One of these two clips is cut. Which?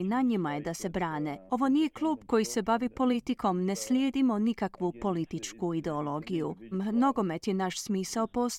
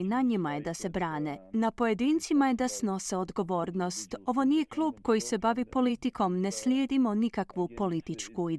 first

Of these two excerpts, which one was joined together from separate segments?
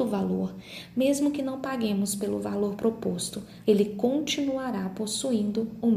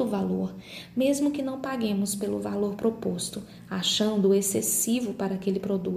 first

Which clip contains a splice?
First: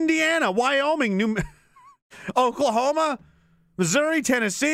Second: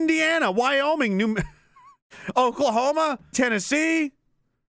second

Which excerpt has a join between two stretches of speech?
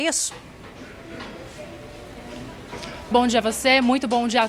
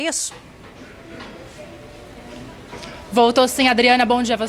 first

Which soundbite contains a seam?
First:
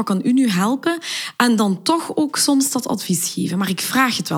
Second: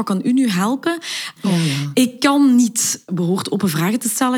second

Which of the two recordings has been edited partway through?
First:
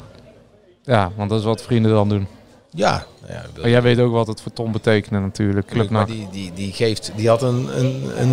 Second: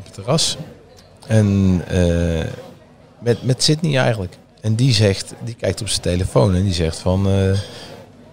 first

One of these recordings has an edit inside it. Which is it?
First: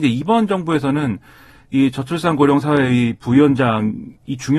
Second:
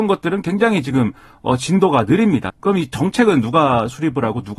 second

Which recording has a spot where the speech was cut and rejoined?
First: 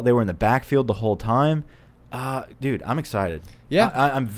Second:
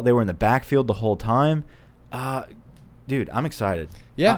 first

